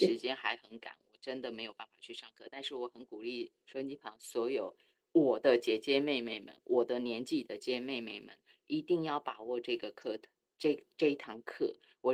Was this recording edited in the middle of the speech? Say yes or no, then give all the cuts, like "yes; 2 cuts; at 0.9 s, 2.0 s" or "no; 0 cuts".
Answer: yes; 1 cut; at 7.6 s